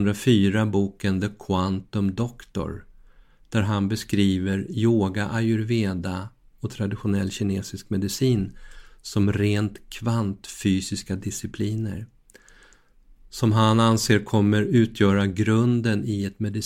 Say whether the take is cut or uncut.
uncut